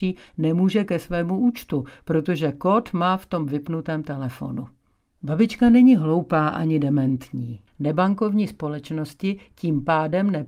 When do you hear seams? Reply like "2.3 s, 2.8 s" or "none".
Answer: 5.2 s, 7.7 s